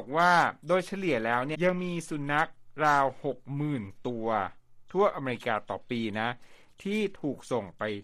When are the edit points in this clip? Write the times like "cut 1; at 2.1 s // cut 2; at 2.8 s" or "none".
cut 1; at 1.5 s